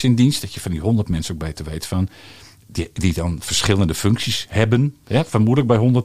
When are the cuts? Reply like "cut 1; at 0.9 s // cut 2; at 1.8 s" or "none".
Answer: none

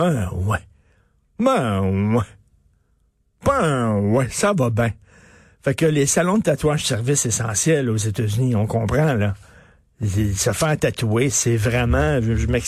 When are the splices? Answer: none

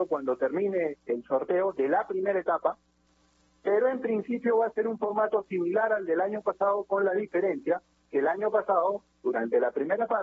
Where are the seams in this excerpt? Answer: cut 1; at 0.9 s

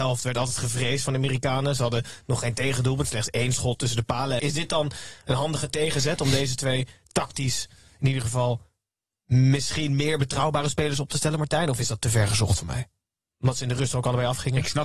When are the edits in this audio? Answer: cut 1; at 4.4 s

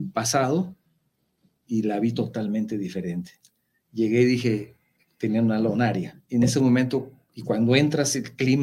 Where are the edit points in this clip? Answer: cut 1; at 6.2 s

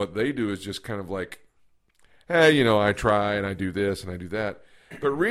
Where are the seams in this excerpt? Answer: none

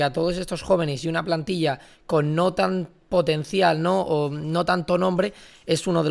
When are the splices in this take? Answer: none

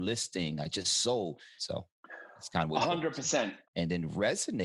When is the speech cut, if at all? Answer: cut 1; at 1.6 s // cut 2; at 3.6 s

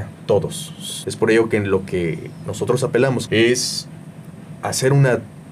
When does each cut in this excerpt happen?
cut 1; at 1.0 s // cut 2; at 3.3 s

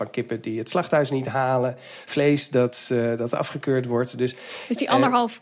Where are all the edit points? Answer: none

